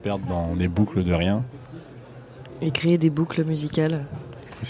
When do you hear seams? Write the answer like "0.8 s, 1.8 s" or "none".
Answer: none